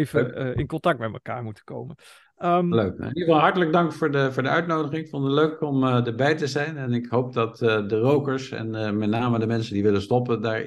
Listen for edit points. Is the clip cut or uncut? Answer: uncut